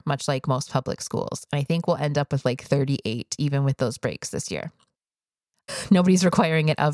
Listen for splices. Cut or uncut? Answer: cut